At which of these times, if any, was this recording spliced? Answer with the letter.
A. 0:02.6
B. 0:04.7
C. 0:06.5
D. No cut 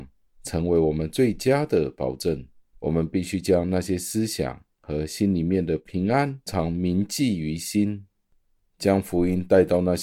C